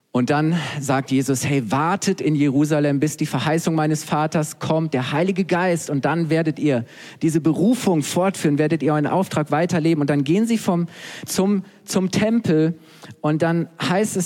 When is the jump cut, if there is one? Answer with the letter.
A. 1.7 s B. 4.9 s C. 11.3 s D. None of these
C